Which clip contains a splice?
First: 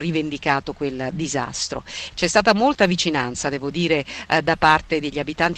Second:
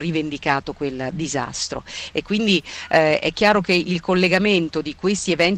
first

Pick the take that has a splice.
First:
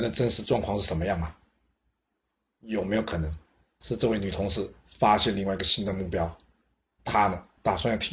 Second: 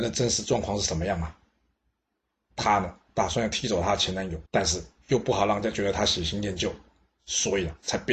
second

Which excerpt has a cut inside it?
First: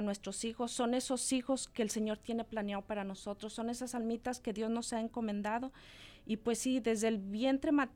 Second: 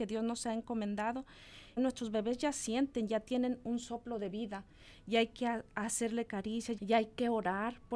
second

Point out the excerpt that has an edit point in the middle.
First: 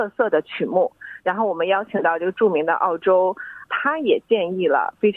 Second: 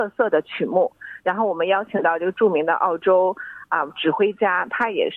first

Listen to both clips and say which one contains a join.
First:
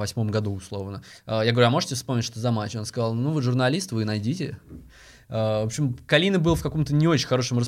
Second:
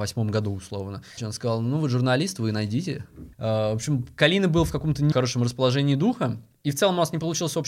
second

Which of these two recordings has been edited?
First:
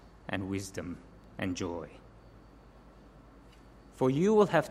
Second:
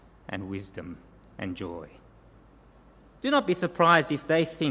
second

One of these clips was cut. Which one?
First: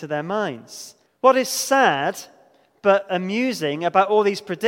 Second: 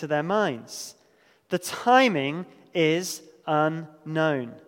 first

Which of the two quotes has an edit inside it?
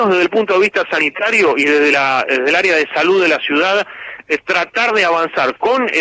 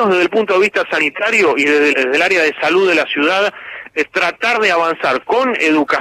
second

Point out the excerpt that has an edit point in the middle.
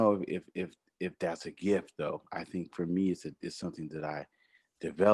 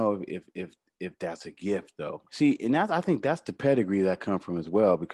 second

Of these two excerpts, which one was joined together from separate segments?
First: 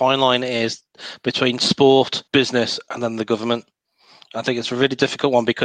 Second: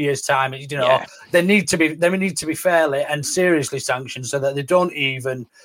first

